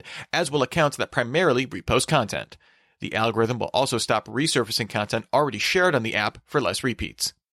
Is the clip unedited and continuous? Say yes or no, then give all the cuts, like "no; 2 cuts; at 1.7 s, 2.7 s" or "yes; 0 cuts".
yes; 0 cuts